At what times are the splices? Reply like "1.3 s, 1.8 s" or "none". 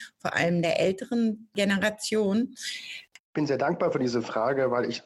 3.2 s